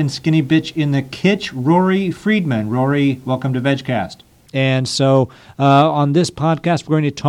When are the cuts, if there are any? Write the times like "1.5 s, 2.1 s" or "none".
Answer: 4.5 s